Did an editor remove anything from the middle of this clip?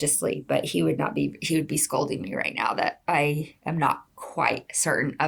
no; 0 cuts

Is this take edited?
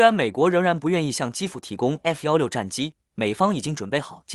yes; 1 cut; at 3.1 s

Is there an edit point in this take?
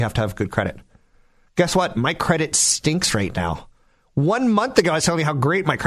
no; 0 cuts

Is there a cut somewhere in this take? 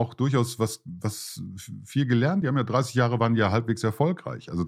no; 0 cuts

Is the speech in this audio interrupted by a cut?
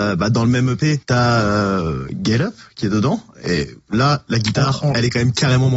yes; 1 cut; at 1.0 s

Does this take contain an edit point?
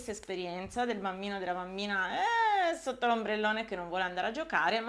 no; 0 cuts

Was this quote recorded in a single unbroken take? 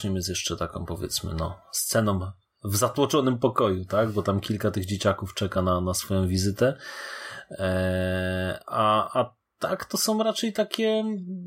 yes; 0 cuts

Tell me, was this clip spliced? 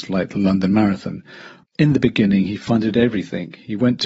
yes; 1 cut; at 1.6 s

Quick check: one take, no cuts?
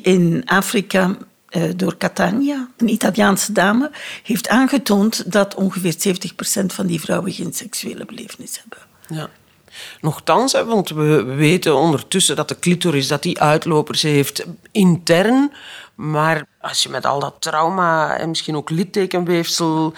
yes; 0 cuts

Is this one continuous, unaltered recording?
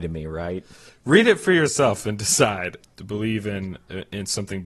no; 1 cut; at 2.8 s

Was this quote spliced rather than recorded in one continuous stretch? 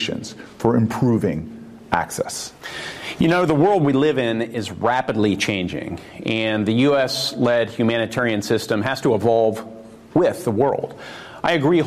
no; 0 cuts

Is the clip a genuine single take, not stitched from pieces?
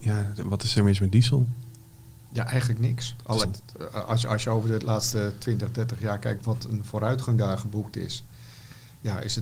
no; 1 cut; at 3.4 s

